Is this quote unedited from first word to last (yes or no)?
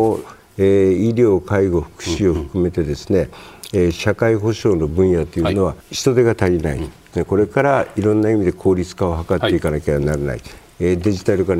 no